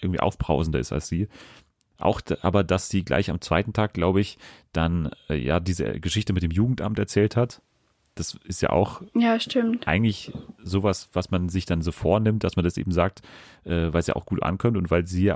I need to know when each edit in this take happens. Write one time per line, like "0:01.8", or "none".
none